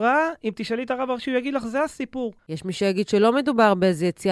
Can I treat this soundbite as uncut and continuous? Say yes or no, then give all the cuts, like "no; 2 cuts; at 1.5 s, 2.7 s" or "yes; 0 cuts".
no; 1 cut; at 2.4 s